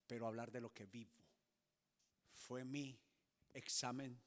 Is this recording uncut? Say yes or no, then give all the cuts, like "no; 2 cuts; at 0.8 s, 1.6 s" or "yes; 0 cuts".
no; 1 cut; at 2.1 s